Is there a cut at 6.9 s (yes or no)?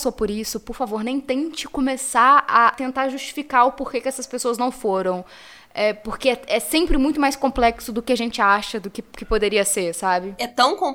no